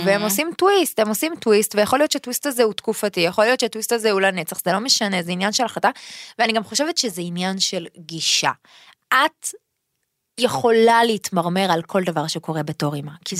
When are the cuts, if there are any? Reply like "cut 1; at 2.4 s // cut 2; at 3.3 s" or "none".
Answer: none